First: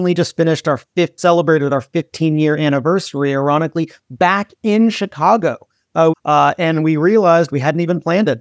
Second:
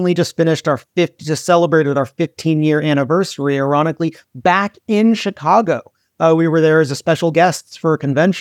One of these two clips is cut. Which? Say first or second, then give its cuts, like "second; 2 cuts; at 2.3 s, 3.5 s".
first; 2 cuts; at 1.2 s, 6.1 s